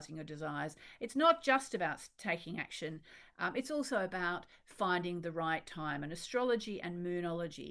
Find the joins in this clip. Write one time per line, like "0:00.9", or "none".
none